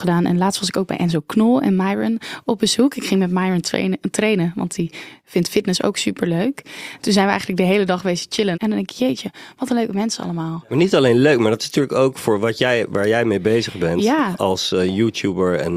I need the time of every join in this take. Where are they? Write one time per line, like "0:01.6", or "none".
0:08.5